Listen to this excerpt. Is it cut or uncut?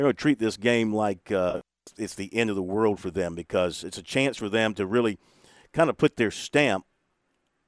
uncut